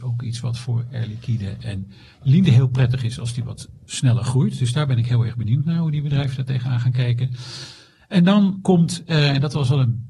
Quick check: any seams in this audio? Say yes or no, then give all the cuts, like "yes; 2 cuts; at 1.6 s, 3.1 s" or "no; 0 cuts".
no; 0 cuts